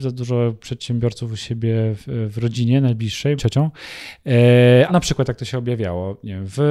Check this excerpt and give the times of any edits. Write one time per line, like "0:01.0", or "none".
0:03.4
0:04.9

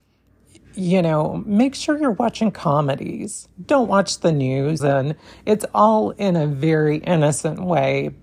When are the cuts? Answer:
0:04.8

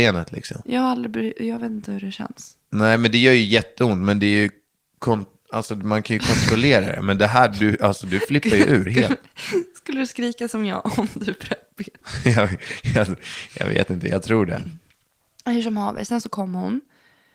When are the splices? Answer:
none

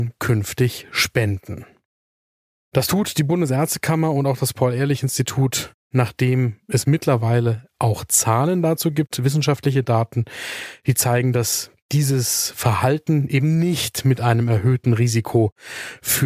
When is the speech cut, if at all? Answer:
none

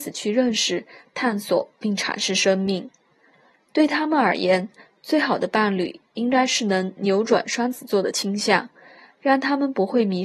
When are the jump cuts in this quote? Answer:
none

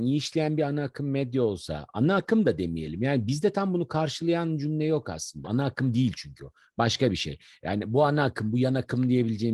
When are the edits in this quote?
0:05.4

